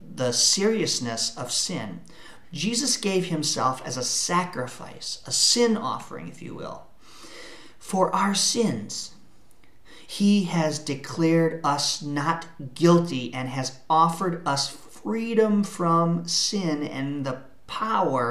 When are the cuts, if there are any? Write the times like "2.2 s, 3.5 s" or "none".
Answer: 2.4 s, 10.1 s